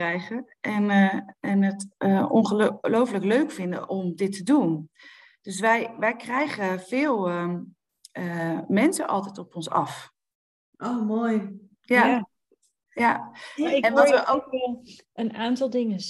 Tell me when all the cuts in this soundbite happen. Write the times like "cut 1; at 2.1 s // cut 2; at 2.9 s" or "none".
none

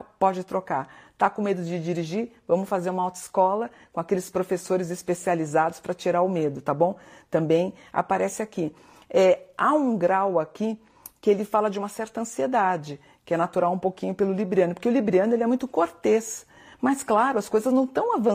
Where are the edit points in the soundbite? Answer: none

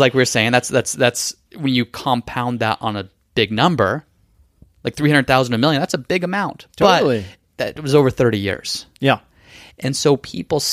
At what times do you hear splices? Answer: none

